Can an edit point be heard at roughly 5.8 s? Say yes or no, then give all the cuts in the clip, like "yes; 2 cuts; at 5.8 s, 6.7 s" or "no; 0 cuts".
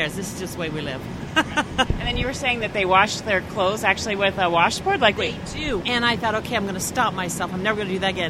yes; 1 cut; at 5.8 s